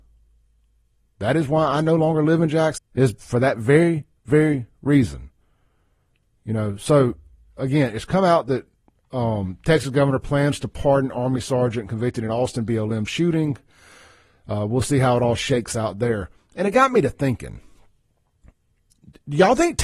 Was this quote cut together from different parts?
yes; 1 cut; at 2.8 s

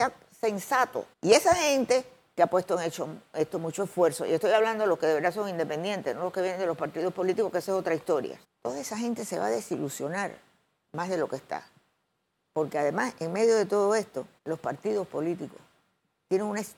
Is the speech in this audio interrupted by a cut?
yes; 3 cuts; at 1.1 s, 8.4 s, 14.4 s

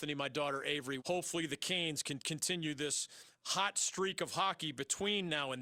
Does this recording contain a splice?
yes; 1 cut; at 1.0 s

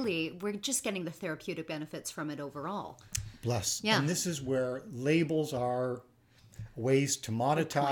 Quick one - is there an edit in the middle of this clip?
no; 0 cuts

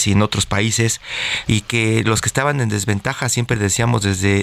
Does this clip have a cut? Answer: yes; 1 cut; at 1.5 s

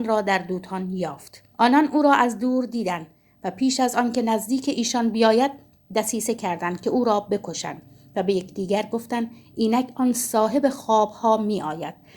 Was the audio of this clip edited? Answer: yes; 1 cut; at 1.5 s

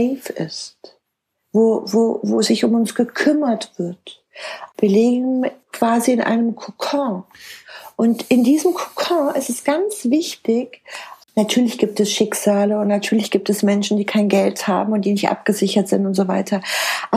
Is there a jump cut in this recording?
no; 0 cuts

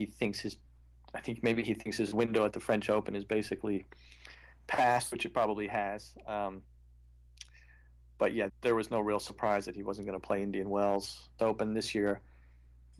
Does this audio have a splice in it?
yes; 2 cuts; at 8.5 s, 11.4 s

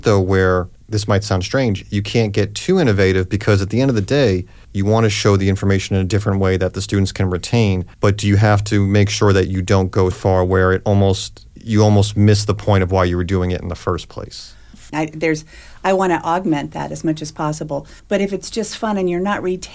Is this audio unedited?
no; 2 cuts; at 10.1 s, 14.9 s

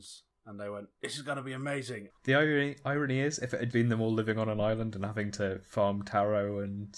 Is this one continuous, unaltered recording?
no; 2 cuts; at 2.1 s, 3.7 s

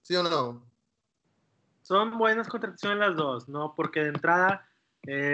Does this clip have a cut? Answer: no; 0 cuts

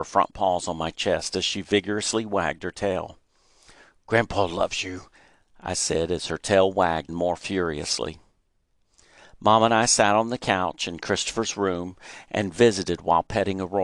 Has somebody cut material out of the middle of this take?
yes; 1 cut; at 7.1 s

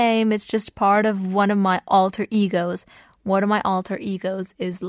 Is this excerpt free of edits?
yes; 0 cuts

